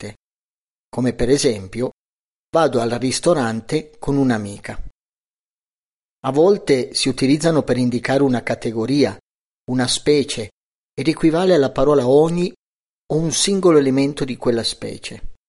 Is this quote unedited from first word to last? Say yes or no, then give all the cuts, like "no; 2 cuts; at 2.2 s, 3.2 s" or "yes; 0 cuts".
yes; 0 cuts